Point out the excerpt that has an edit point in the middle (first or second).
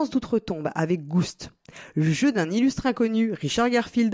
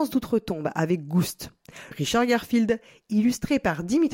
second